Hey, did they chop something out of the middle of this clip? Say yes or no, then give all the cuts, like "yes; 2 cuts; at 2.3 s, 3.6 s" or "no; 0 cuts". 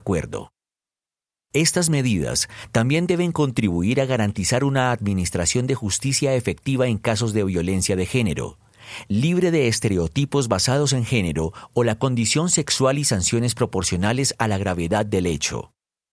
no; 0 cuts